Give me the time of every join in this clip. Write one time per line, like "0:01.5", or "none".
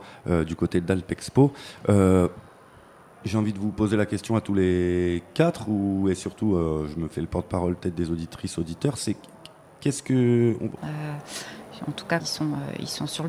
0:10.8
0:12.2